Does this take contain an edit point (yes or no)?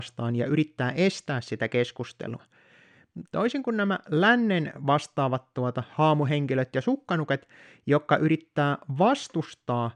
yes